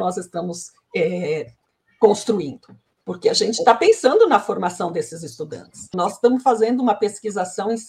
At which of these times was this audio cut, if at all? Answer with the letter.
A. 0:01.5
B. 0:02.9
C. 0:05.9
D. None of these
C